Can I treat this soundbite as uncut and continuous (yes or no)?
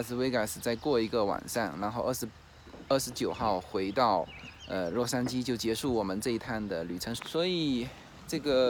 no